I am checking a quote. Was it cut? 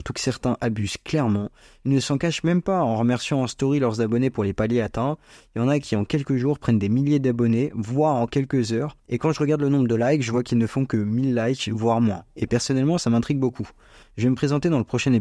yes; 1 cut; at 9.0 s

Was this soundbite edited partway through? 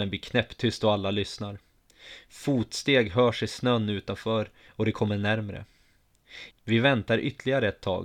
yes; 1 cut; at 6.5 s

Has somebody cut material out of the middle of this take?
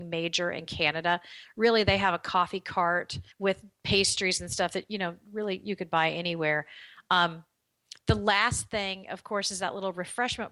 yes; 1 cut; at 3.3 s

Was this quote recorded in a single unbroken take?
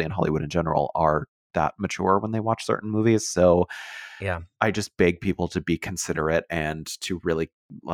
yes; 0 cuts

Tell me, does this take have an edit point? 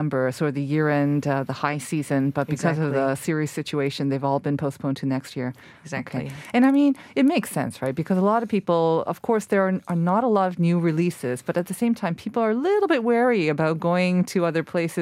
no; 0 cuts

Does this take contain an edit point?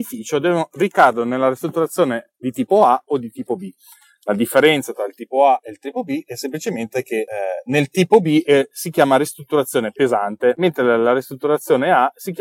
no; 0 cuts

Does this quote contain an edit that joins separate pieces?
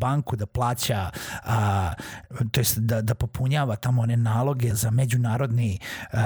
yes; 1 cut; at 4.7 s

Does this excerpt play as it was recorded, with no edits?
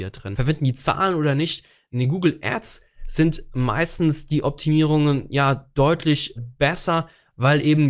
no; 1 cut; at 6.4 s

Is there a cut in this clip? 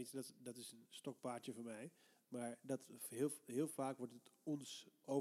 no; 0 cuts

